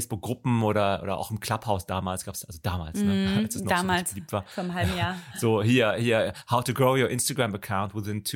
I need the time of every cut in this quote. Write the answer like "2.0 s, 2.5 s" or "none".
none